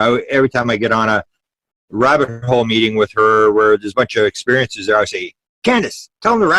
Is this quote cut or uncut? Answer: uncut